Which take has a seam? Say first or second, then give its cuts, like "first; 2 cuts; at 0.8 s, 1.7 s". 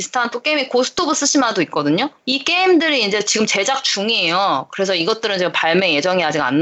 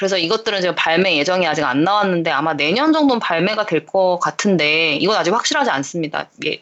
first; 1 cut; at 2.2 s